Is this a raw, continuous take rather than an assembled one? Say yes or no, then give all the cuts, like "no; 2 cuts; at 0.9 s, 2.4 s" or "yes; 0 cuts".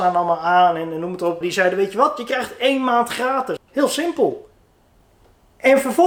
no; 2 cuts; at 1.4 s, 3.6 s